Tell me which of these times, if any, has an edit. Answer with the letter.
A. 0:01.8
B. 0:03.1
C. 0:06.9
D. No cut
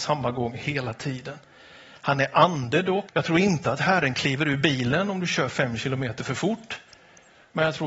B